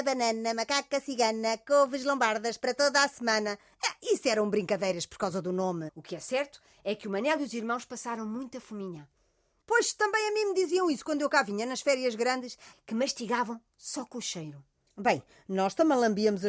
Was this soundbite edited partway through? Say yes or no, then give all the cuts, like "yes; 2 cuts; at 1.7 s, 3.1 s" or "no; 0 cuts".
yes; 3 cuts; at 5.9 s, 9.6 s, 12.7 s